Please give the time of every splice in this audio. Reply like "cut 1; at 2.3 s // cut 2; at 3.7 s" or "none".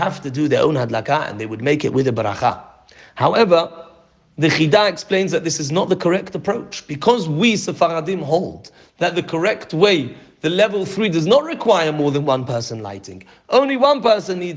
none